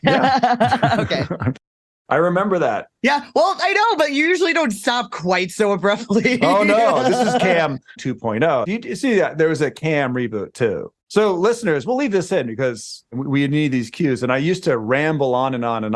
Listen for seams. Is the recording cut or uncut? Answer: uncut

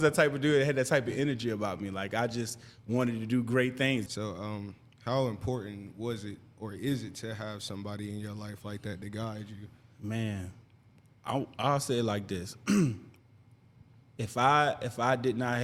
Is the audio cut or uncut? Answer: cut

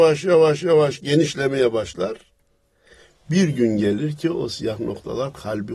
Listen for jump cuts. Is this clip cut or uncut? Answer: uncut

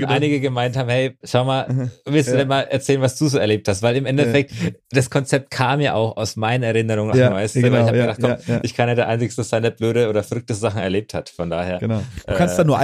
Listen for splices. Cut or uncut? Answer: cut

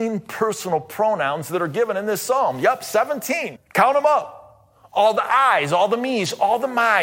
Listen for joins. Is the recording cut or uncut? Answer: cut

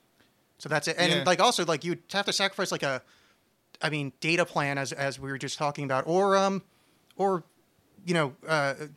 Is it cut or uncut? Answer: uncut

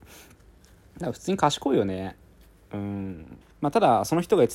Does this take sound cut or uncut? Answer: cut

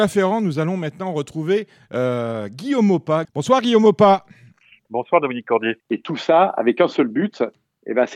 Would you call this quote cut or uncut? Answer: cut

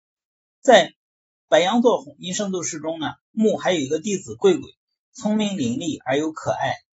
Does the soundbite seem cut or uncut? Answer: cut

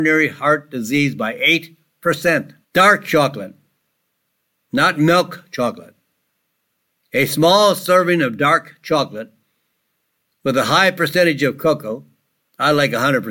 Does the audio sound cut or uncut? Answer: cut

